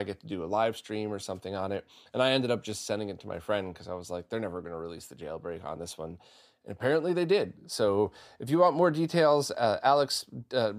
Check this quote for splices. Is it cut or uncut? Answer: uncut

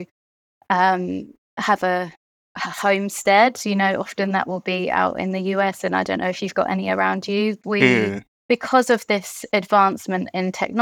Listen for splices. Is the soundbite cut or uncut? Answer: cut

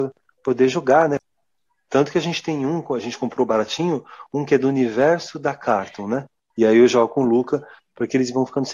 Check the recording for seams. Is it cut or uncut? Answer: cut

